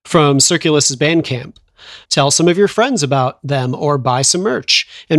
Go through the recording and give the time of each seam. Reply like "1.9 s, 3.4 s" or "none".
2.0 s